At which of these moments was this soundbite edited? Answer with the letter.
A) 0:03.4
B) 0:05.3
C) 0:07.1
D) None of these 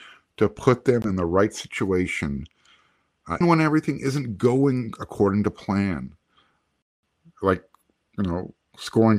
A